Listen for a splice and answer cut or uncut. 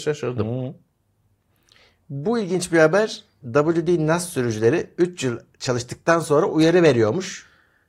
uncut